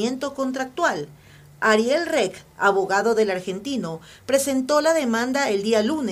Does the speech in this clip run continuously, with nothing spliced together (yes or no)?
yes